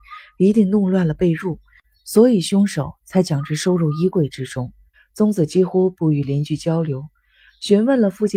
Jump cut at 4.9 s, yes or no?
yes